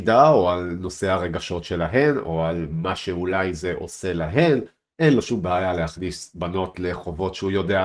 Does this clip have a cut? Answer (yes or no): no